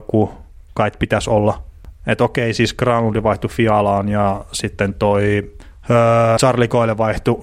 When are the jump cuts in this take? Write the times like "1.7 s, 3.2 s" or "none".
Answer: 1.9 s, 6.4 s